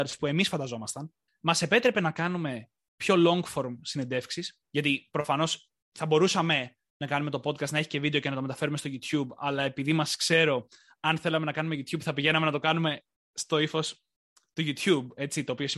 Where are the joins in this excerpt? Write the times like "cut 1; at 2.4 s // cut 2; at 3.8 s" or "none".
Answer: cut 1; at 1.3 s // cut 2; at 4.7 s